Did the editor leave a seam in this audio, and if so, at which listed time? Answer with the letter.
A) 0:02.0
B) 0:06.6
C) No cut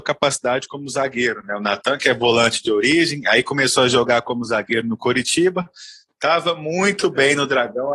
C